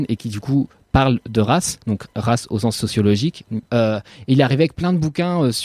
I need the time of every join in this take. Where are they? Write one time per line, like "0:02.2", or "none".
0:03.7